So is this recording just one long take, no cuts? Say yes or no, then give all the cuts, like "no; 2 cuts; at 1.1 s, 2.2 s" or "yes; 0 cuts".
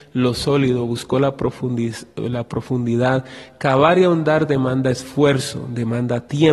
yes; 0 cuts